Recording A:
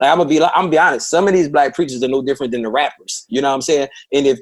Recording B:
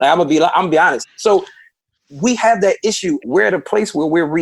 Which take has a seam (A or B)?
B